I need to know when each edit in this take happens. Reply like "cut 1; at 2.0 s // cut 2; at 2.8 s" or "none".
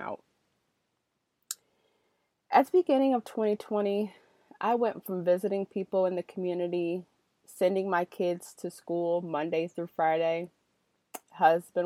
none